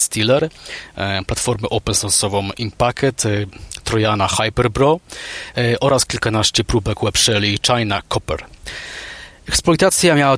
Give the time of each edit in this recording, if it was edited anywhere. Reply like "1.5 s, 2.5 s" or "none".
none